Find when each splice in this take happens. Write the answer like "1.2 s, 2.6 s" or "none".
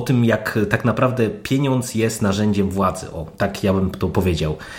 none